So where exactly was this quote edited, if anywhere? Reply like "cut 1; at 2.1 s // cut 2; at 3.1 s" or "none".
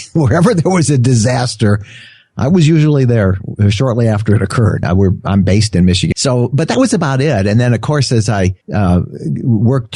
cut 1; at 4.8 s // cut 2; at 6.1 s // cut 3; at 8.6 s